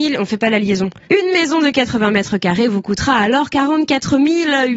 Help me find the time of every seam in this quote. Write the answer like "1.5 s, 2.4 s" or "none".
1.0 s

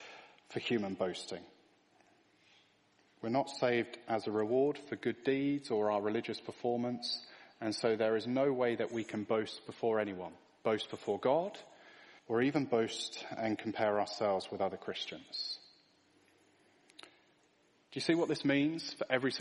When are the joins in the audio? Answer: 12.2 s

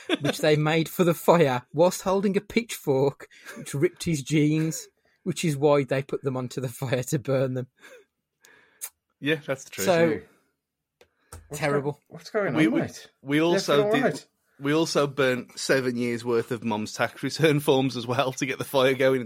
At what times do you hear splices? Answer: none

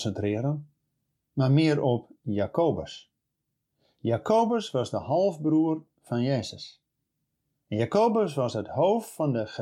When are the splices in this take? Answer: none

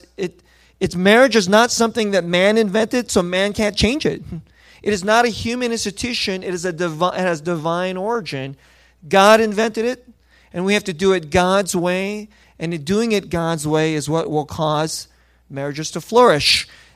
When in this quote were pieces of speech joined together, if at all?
none

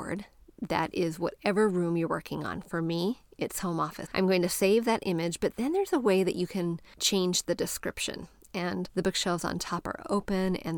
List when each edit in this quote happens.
4.0 s, 8.5 s

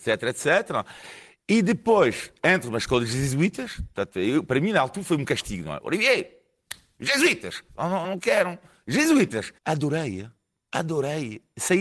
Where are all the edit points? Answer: 8.0 s, 9.6 s

